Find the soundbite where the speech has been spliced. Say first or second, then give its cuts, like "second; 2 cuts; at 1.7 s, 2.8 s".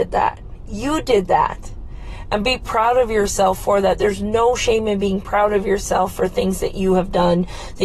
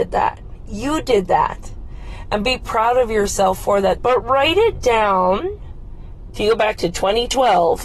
second; 2 cuts; at 4.0 s, 6.3 s